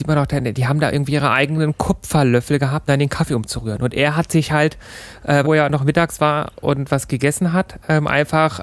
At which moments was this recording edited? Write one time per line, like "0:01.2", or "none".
0:02.9
0:05.4